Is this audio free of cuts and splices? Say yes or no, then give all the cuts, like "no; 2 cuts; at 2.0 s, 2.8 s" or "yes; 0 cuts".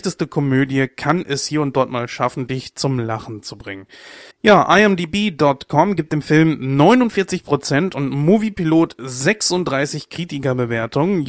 no; 1 cut; at 4.3 s